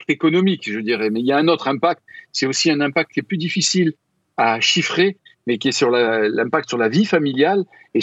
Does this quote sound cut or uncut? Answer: uncut